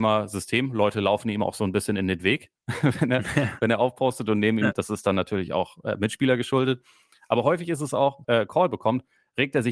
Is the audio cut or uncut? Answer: cut